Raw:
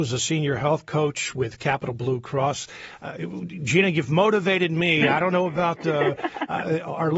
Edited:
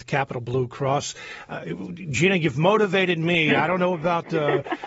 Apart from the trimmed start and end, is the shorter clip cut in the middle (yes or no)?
no